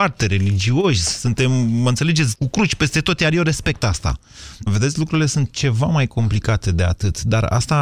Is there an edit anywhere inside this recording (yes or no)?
yes